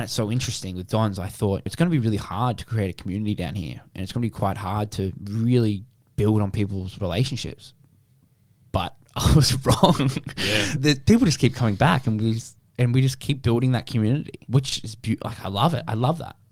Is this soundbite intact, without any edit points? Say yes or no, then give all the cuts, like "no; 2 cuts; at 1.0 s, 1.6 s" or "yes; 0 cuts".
yes; 0 cuts